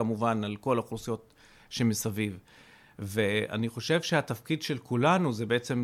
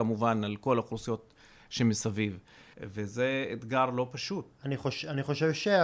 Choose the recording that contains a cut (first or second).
second